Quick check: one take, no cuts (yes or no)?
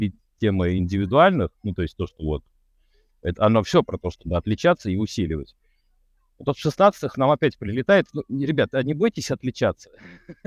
yes